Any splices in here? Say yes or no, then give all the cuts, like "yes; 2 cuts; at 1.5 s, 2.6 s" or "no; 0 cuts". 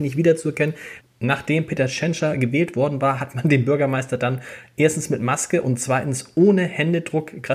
yes; 1 cut; at 1.0 s